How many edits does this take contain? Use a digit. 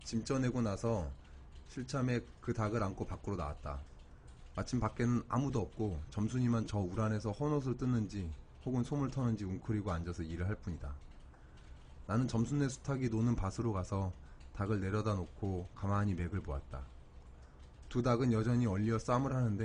0